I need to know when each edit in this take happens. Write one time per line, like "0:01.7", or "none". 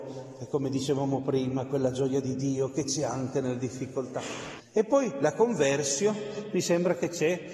0:04.6